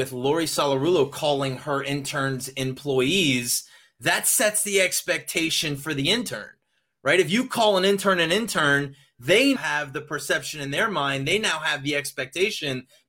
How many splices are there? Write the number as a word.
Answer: one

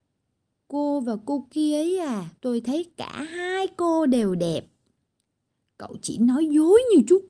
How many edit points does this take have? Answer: one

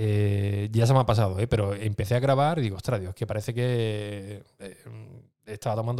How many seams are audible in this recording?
zero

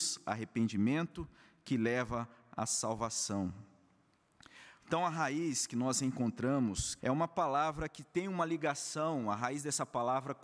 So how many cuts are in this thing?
two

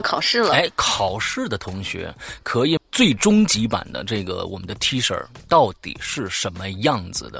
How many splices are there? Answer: one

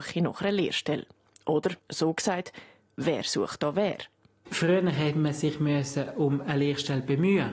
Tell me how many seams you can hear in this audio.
zero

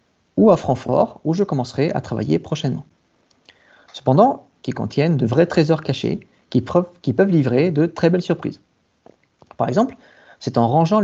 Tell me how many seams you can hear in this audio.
one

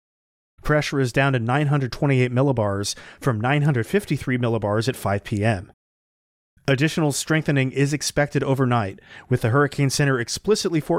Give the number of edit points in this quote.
one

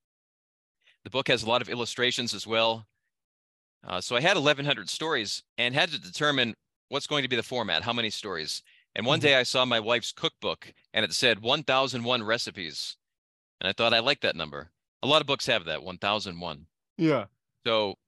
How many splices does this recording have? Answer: one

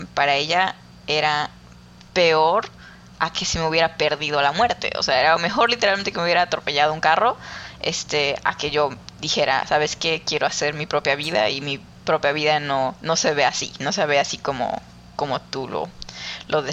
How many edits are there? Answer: zero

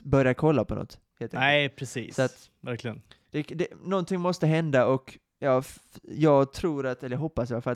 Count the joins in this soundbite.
zero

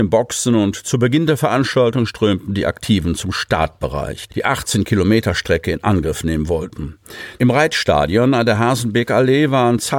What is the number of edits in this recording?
two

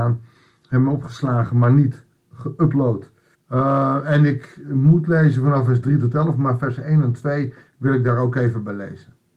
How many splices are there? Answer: one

